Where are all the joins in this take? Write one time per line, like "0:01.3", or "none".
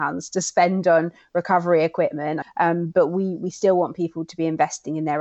0:02.4